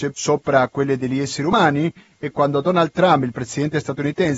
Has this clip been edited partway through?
yes; 1 cut; at 2.3 s

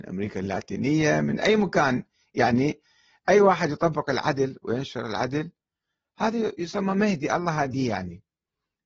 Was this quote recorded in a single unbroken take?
yes; 0 cuts

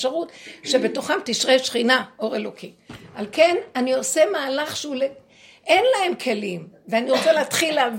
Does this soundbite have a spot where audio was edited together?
no; 0 cuts

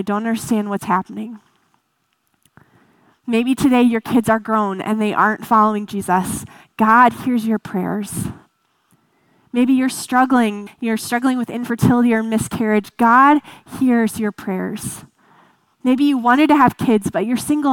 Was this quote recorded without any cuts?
no; 1 cut; at 10.7 s

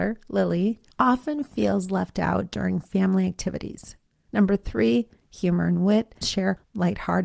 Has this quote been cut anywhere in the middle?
yes; 2 cuts; at 4.1 s, 6.2 s

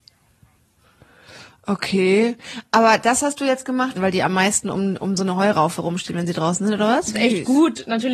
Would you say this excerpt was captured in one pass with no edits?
no; 2 cuts; at 3.9 s, 7.1 s

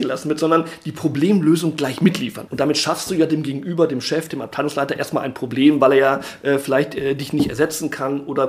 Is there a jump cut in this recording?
yes; 1 cut; at 2.5 s

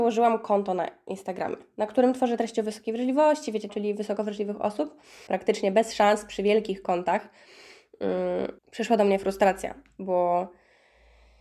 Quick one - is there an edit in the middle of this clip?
yes; 3 cuts; at 3.7 s, 5.3 s, 8.6 s

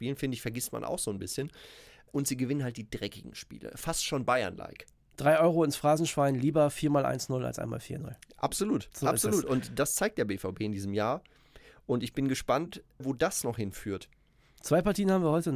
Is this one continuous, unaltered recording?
yes; 0 cuts

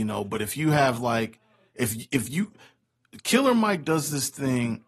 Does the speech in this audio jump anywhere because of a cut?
no; 0 cuts

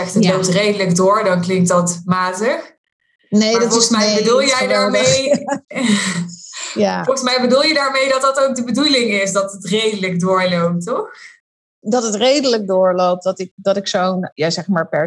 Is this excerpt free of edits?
yes; 0 cuts

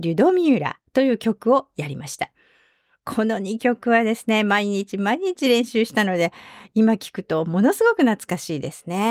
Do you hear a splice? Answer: no; 0 cuts

